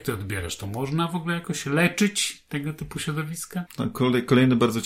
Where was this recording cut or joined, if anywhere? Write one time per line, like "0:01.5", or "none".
0:03.7